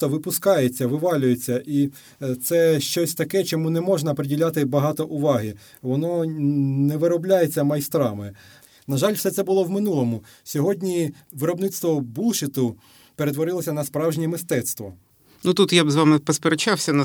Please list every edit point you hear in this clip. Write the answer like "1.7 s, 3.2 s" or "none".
none